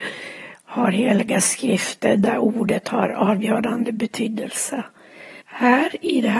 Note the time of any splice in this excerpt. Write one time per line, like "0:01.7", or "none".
0:05.4